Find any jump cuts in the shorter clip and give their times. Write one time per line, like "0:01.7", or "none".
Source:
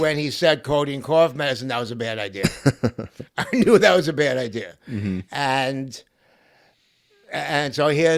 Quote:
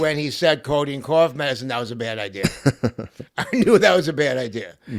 none